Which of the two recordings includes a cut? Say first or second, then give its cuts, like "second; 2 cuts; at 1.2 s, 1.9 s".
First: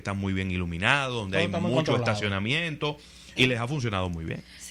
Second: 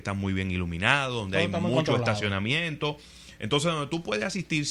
first; 1 cut; at 3.4 s